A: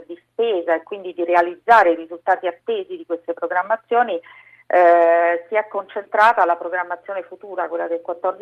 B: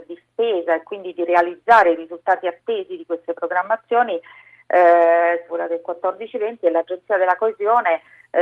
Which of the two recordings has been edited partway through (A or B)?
B